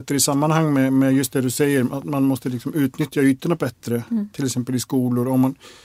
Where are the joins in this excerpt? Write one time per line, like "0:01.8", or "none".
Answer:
none